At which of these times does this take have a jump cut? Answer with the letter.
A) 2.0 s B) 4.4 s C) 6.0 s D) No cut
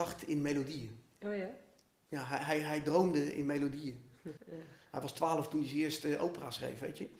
B